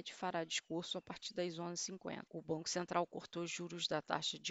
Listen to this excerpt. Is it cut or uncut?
cut